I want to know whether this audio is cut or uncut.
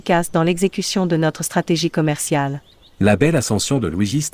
uncut